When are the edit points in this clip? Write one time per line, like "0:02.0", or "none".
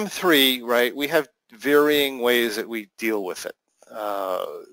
none